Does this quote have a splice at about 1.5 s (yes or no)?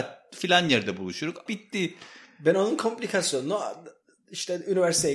yes